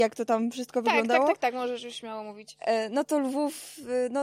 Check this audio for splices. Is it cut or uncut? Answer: cut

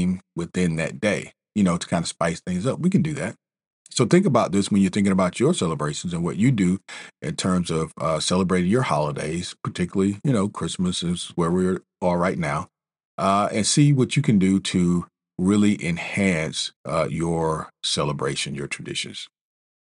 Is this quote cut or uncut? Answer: cut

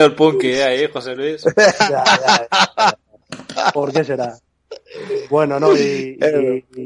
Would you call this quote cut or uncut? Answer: uncut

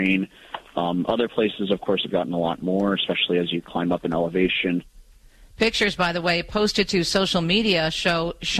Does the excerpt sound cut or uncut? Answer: uncut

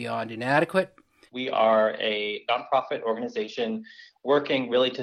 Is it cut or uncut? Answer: cut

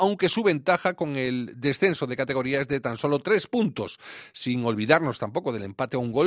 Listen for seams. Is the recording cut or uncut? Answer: uncut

